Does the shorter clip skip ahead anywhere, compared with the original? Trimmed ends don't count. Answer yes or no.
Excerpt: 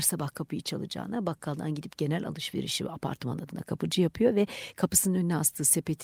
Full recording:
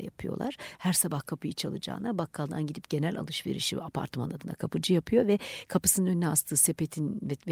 no